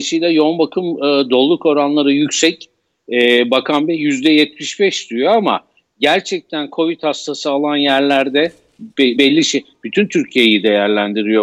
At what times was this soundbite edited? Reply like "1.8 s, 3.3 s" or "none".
9.2 s